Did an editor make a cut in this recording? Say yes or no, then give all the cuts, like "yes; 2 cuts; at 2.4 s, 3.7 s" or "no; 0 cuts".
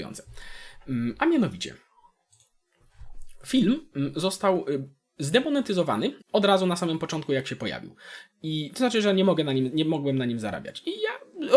yes; 1 cut; at 6.2 s